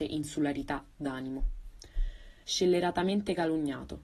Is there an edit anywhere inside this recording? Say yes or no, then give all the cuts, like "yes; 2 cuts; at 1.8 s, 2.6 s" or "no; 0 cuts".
yes; 1 cut; at 2.4 s